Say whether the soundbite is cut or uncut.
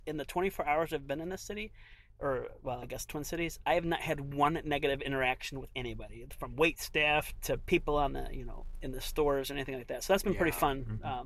cut